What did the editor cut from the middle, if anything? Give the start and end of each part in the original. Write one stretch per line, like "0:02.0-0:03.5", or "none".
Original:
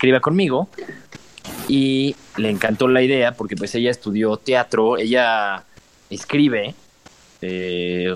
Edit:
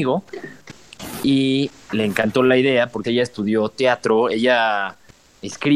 0:03.5-0:03.7